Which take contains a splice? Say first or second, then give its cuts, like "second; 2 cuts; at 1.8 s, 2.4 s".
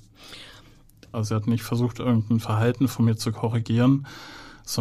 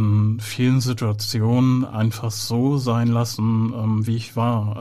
first; 1 cut; at 1.1 s